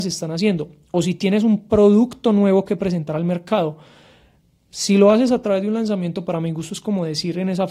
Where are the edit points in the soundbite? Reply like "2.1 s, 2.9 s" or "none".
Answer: none